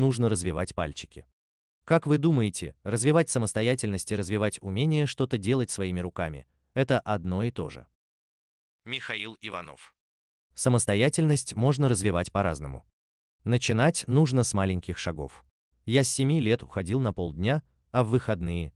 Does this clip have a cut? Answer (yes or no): yes